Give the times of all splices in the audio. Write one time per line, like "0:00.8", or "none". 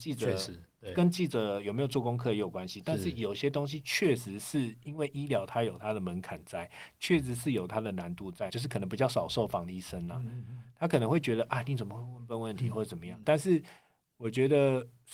0:08.5
0:13.2